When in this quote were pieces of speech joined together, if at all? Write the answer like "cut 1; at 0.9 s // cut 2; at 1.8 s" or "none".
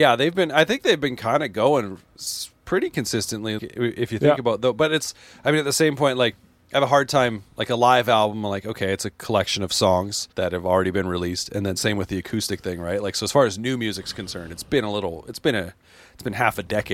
cut 1; at 3.6 s // cut 2; at 10.3 s